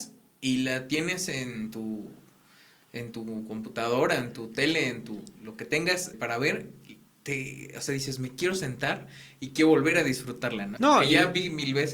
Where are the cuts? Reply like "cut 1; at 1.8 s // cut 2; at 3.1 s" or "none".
cut 1; at 6.1 s // cut 2; at 10.8 s